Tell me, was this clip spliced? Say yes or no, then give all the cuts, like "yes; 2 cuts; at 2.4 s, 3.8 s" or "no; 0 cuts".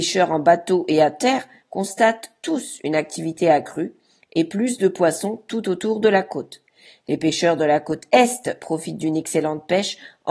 no; 0 cuts